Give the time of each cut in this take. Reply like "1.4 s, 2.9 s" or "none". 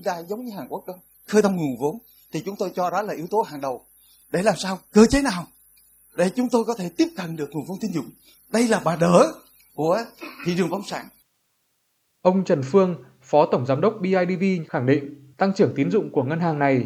15.3 s